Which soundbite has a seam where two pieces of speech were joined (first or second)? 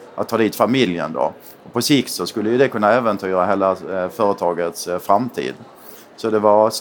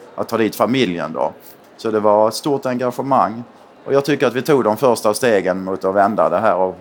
second